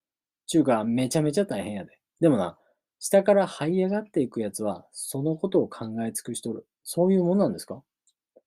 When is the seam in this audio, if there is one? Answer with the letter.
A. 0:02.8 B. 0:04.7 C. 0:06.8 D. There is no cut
C